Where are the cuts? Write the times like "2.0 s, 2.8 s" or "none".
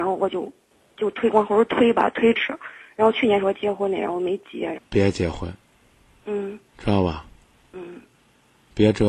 4.7 s, 6.7 s